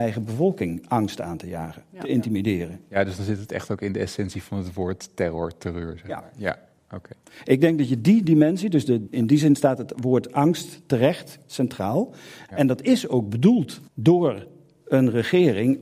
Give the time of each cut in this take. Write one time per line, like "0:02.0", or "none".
0:09.1
0:12.5
0:13.9